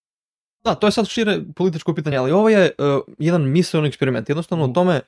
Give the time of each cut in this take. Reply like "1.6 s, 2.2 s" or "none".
none